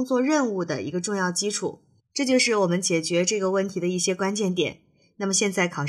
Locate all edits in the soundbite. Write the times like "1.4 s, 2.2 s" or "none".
2.0 s